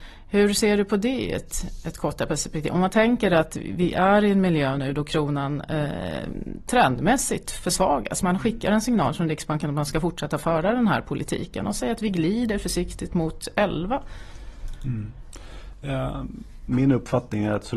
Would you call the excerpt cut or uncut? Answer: uncut